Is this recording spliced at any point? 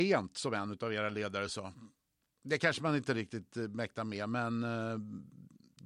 no; 0 cuts

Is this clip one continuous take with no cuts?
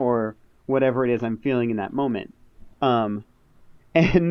no; 1 cut; at 2.7 s

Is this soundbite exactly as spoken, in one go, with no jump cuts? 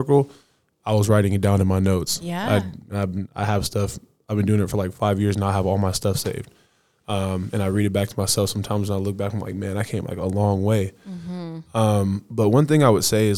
yes; 0 cuts

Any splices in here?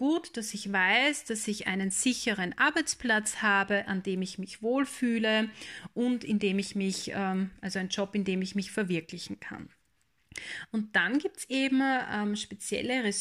no; 0 cuts

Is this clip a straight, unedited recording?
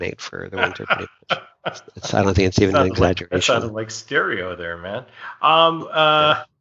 yes; 0 cuts

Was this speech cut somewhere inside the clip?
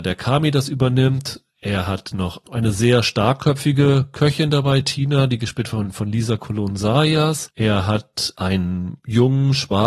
no; 0 cuts

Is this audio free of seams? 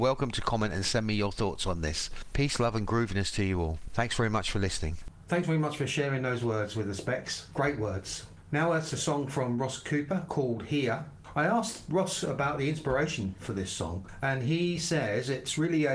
yes; 0 cuts

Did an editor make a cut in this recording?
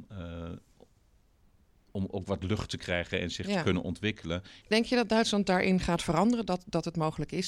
yes; 1 cut; at 4.6 s

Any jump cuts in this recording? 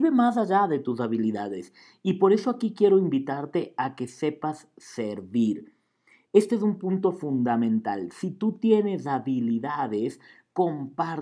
no; 0 cuts

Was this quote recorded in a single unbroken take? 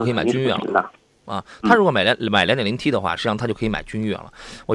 yes; 0 cuts

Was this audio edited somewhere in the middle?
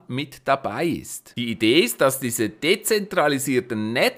yes; 1 cut; at 1.3 s

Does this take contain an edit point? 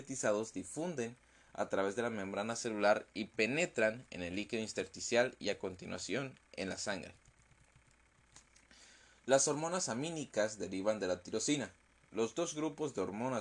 no; 0 cuts

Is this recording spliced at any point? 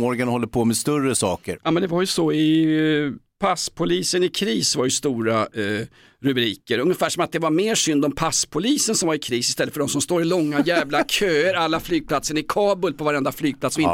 no; 0 cuts

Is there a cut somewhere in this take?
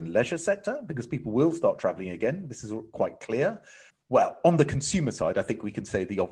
yes; 1 cut; at 3.9 s

